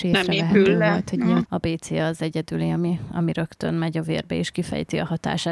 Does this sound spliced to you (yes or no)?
yes